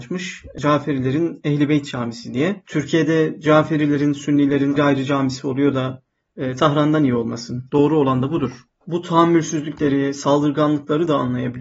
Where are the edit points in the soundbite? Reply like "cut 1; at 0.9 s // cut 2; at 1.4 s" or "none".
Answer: cut 1; at 4.8 s // cut 2; at 7.7 s